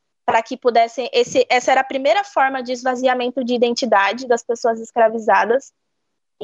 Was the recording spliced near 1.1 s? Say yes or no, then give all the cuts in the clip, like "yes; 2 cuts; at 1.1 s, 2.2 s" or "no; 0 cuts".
no; 0 cuts